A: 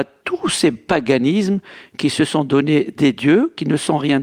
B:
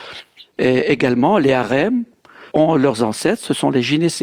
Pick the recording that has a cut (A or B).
B